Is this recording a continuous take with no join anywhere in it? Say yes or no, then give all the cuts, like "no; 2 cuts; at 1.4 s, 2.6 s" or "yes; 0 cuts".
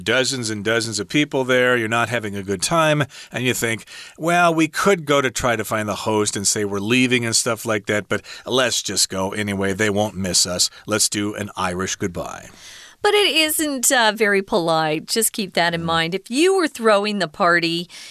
yes; 0 cuts